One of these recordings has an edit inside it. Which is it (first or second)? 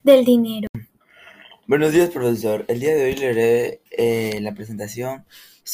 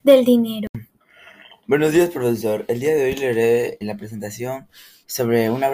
second